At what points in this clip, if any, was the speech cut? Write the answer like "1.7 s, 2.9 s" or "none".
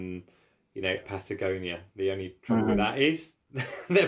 1.0 s